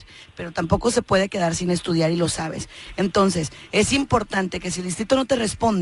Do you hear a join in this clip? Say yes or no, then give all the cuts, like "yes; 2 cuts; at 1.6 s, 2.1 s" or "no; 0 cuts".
no; 0 cuts